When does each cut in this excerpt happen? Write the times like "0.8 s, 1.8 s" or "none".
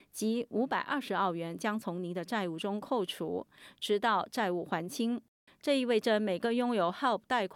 5.5 s